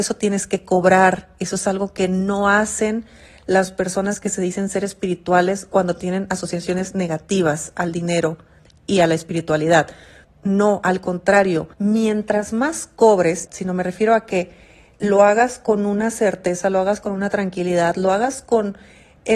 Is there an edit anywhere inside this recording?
yes; 3 cuts; at 10.2 s, 11.7 s, 13.5 s

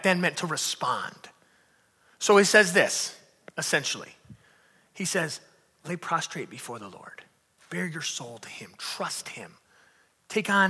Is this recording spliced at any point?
no; 0 cuts

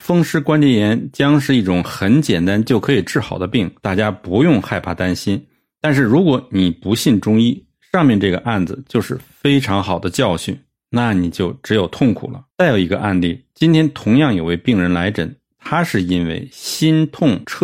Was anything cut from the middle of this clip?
yes; 1 cut; at 12.5 s

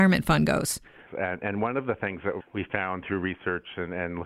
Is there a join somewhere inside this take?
yes; 2 cuts; at 1.1 s, 2.4 s

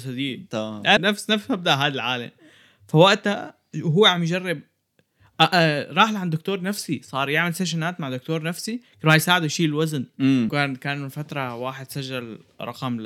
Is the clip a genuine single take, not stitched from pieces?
no; 2 cuts; at 1.0 s, 10.5 s

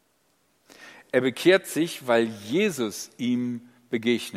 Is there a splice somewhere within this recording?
no; 0 cuts

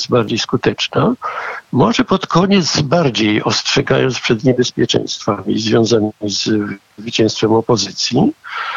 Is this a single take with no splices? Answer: no; 1 cut; at 1.7 s

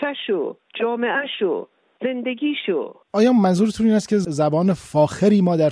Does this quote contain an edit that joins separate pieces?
yes; 1 cut; at 3.0 s

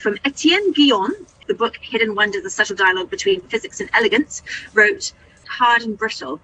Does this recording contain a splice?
yes; 2 cuts; at 1.4 s, 5.4 s

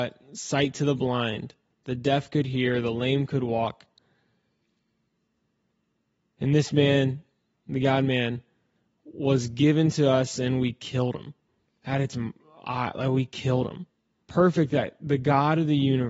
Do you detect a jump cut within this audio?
yes; 3 cuts; at 7.5 s, 11.7 s, 14.2 s

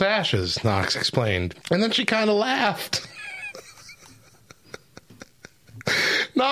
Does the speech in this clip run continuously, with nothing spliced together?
no; 1 cut; at 1.6 s

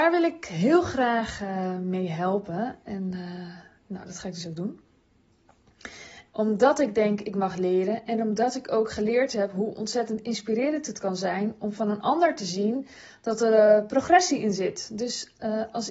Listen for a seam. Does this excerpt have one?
yes; 1 cut; at 6.3 s

